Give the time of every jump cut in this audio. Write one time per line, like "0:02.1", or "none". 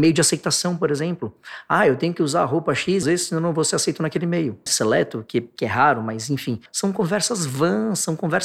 0:03.0
0:04.7
0:06.7